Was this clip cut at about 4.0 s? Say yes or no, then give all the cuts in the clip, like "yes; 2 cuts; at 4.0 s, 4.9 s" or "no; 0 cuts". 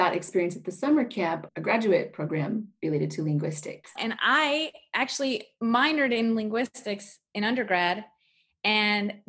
yes; 2 cuts; at 1.5 s, 4.0 s